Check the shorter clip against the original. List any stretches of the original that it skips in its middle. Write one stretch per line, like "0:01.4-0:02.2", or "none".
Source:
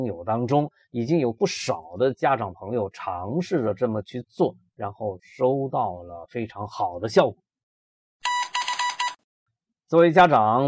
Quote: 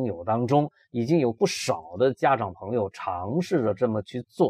none

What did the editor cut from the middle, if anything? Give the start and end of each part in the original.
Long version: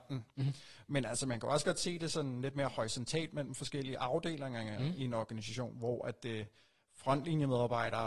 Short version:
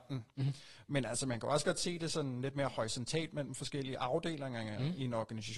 none

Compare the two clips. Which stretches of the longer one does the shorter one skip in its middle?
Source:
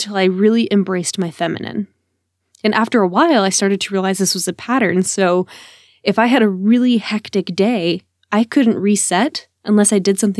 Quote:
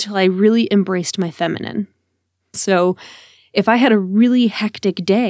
0:02.5-0:05.0

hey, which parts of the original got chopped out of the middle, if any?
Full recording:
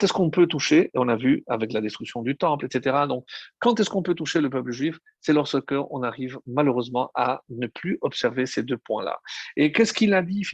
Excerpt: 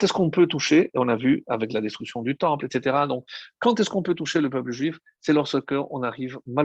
none

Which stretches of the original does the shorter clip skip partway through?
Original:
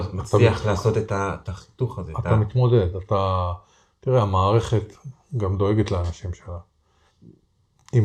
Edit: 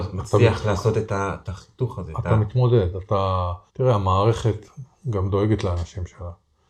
0:03.7-0:03.9

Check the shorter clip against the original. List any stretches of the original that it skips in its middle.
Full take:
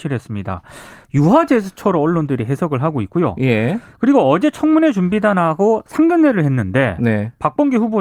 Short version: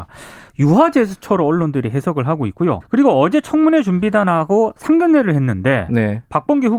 0:03.4-0:03.9

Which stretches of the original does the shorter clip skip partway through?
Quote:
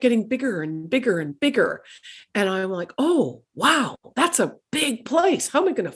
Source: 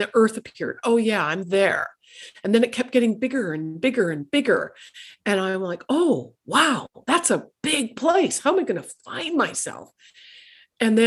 none

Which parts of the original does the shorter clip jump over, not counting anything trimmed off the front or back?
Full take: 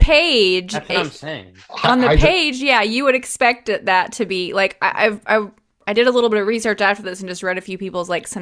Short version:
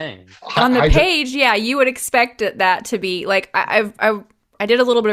none

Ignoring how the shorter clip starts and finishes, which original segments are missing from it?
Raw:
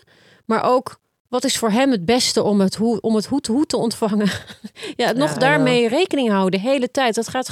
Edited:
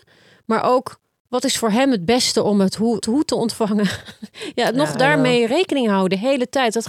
0:03.0-0:03.4

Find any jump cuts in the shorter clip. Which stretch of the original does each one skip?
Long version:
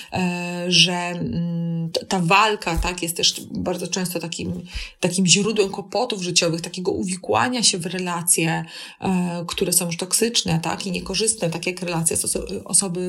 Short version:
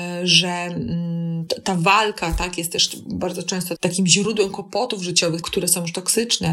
0:04.2-0:05.0
0:06.6-0:09.5

